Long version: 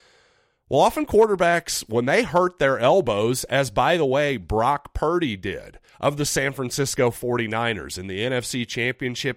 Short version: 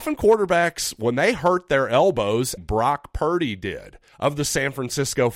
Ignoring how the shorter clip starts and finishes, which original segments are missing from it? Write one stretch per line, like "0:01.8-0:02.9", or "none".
0:03.5-0:04.4